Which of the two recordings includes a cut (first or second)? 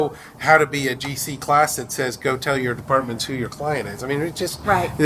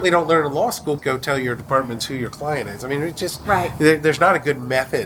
second